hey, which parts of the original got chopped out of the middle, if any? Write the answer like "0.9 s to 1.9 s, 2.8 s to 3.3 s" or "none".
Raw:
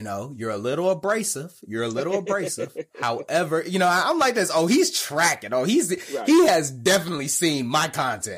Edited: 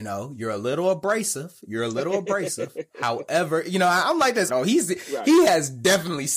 4.5 s to 5.5 s

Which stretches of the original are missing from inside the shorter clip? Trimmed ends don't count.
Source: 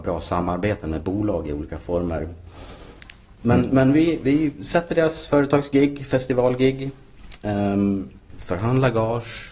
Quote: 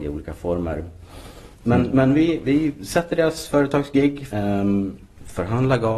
3.0 s to 3.3 s, 6.1 s to 7.4 s

